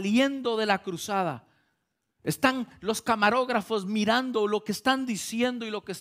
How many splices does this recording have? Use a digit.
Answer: 0